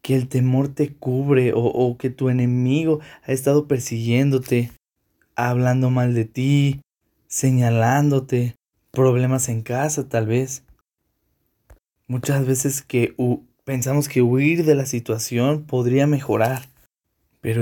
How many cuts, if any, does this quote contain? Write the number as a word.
zero